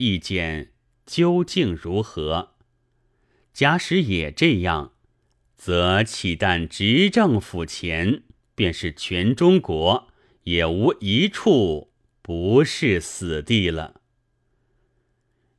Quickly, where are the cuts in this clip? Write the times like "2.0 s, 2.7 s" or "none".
none